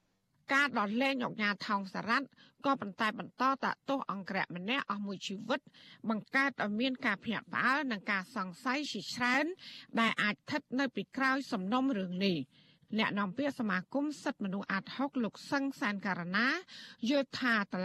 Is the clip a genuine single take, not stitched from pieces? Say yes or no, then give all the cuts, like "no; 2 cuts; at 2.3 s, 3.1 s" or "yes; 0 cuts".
yes; 0 cuts